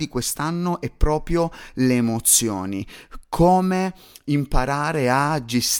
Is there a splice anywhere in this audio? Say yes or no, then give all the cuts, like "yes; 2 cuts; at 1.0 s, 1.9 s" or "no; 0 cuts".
no; 0 cuts